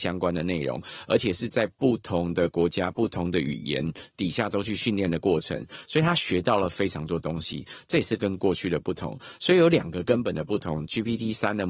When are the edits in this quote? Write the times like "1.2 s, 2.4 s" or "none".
none

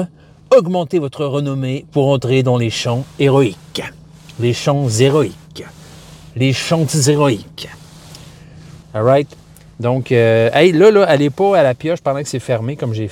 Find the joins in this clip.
8.8 s

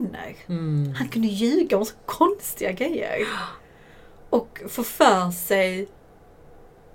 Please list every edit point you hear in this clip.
none

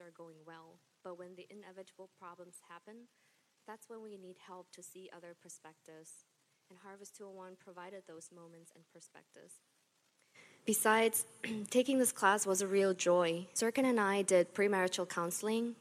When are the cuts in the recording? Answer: 13.5 s

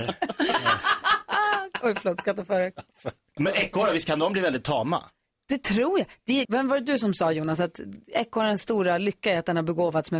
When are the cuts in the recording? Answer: 3.4 s, 6.4 s

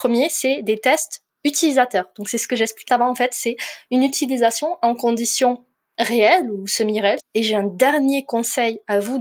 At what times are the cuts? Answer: 2.9 s, 7.2 s

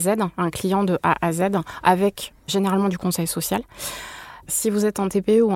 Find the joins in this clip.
4.5 s

